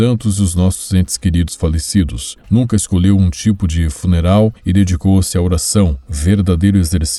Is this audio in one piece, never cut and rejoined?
no; 1 cut; at 2.4 s

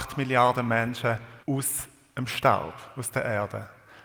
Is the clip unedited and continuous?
no; 1 cut; at 1.4 s

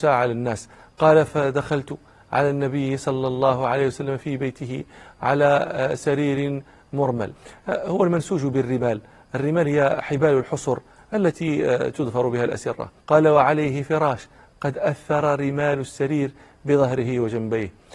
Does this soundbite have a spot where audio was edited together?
yes; 1 cut; at 13.0 s

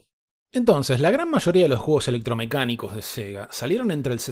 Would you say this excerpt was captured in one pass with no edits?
yes; 0 cuts

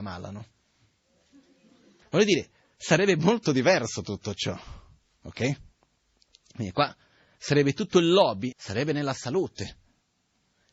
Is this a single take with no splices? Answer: no; 2 cuts; at 2.0 s, 8.5 s

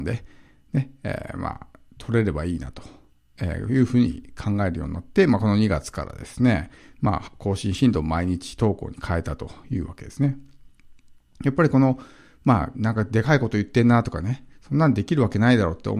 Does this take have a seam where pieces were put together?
yes; 1 cut; at 12.7 s

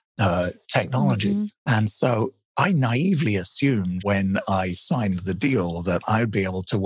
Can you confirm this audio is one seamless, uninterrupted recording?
no; 2 cuts; at 1.6 s, 4.0 s

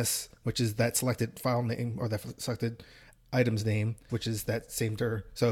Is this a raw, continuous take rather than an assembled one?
no; 1 cut; at 4.1 s

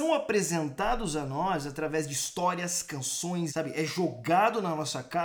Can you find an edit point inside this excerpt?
yes; 1 cut; at 3.5 s

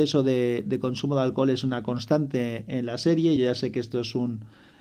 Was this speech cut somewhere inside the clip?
no; 0 cuts

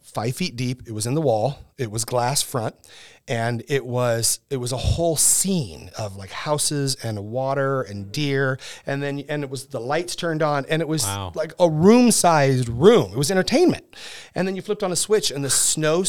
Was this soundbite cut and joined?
no; 0 cuts

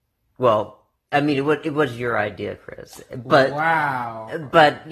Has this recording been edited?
no; 0 cuts

